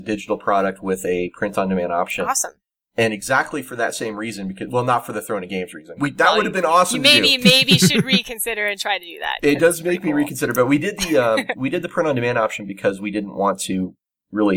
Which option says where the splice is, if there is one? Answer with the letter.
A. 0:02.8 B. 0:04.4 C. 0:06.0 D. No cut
C